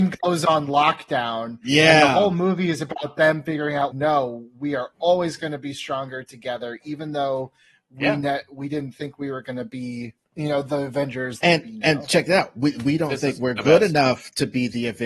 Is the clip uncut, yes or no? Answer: no